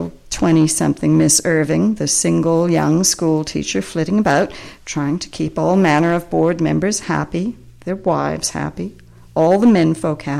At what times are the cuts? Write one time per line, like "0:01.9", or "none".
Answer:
none